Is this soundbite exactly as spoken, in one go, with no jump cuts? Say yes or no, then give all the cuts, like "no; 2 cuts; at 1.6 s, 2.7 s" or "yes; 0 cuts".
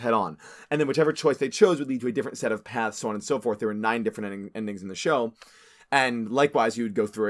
yes; 0 cuts